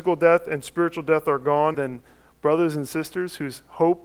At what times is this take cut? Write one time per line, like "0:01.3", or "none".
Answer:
0:01.7